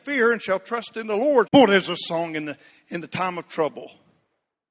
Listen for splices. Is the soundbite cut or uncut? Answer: cut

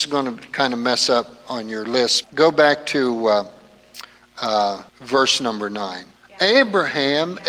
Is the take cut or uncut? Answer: cut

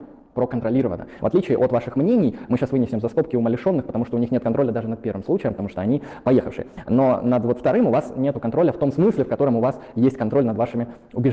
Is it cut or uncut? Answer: uncut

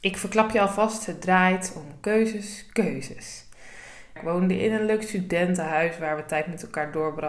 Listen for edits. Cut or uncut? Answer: cut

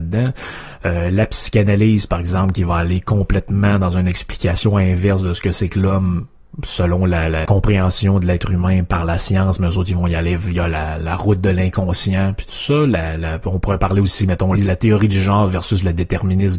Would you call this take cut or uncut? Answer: cut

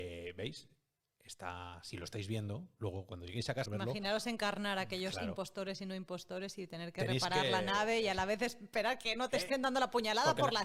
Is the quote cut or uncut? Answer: cut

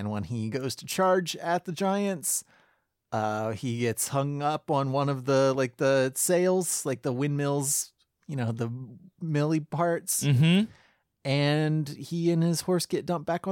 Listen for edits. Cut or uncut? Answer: uncut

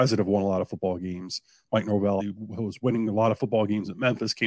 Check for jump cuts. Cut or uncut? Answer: cut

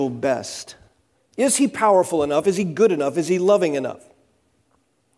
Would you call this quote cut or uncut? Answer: cut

